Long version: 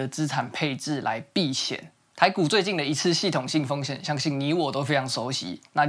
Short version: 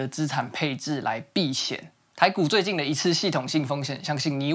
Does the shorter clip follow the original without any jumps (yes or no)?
yes